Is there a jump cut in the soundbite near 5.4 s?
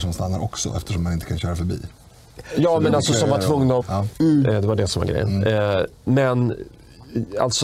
no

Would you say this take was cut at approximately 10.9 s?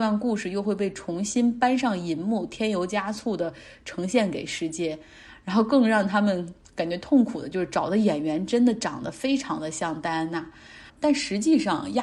yes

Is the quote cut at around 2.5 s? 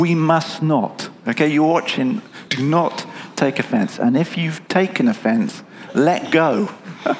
yes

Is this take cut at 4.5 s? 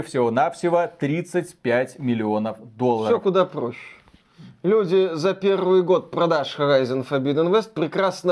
no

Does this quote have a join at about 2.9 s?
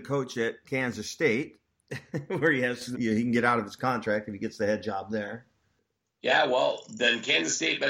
yes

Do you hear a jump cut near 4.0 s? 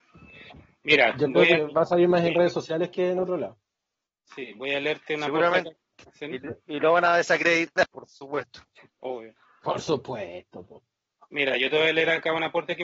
no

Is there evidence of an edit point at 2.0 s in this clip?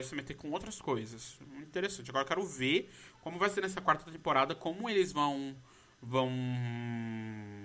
no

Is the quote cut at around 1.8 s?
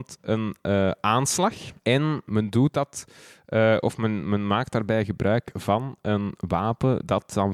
yes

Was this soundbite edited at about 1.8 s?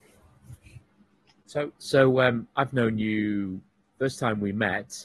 yes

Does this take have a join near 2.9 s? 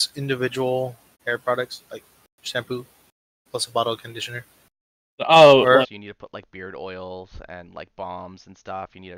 no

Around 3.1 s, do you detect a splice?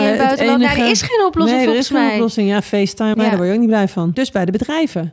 yes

